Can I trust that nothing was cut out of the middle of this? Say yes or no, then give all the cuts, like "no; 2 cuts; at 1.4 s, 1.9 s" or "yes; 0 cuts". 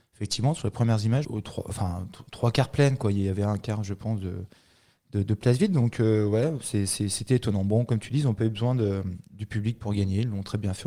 no; 1 cut; at 1.2 s